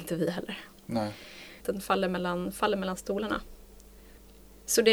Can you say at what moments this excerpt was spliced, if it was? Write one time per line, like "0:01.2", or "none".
0:01.6